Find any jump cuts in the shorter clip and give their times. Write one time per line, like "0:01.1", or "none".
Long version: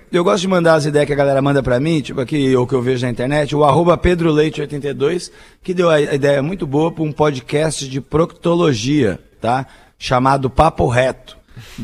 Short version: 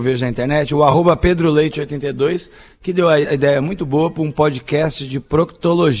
none

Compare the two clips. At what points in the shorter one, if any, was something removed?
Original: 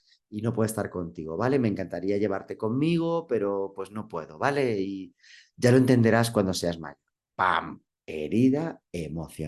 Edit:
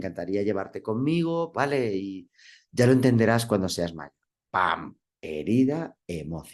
0:01.5

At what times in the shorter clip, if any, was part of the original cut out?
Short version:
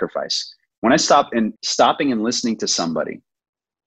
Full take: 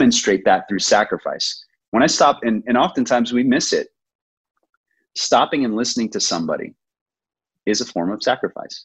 0:01.5

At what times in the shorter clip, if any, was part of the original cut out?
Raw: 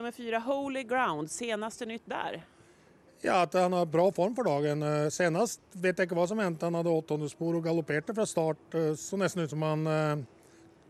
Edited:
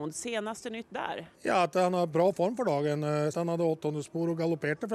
0:01.3
0:03.3

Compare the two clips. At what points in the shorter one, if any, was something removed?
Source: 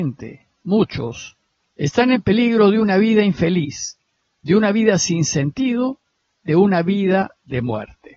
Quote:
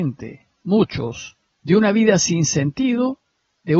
0:01.5

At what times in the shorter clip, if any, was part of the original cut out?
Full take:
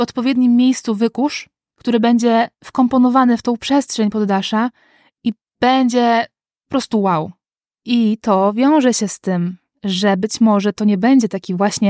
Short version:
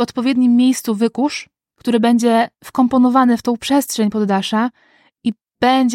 none

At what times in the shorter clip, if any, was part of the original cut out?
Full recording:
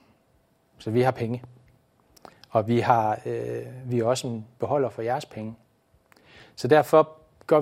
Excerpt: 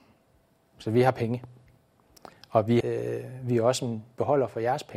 0:02.8

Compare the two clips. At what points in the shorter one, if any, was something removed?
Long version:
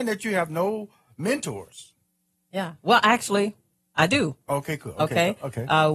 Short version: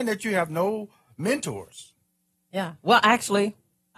none

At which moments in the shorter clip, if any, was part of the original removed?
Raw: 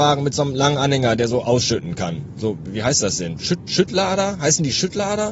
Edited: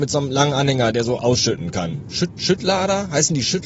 0:02.1

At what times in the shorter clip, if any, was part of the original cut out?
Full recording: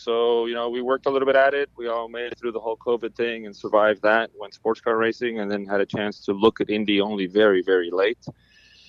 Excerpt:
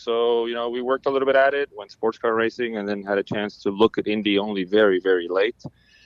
0:01.7

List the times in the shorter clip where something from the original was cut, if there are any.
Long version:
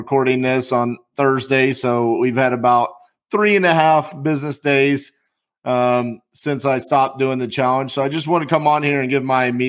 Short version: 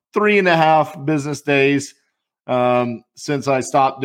none

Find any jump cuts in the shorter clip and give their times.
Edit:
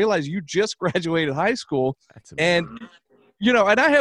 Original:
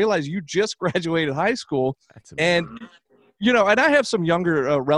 none

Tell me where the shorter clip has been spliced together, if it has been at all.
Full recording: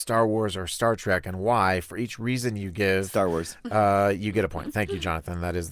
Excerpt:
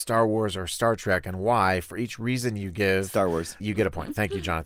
0:03.6

